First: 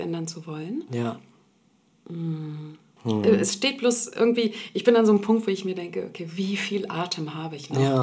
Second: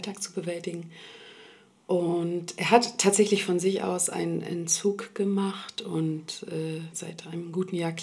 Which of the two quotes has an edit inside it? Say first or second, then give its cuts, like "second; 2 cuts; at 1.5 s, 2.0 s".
second; 1 cut; at 6.9 s